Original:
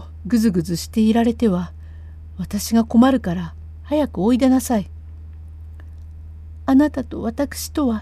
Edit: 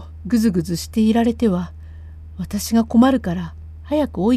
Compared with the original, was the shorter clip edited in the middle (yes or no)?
no